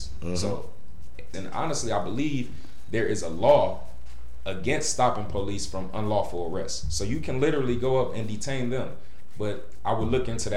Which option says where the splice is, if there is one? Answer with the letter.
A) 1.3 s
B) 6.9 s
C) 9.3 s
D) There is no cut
A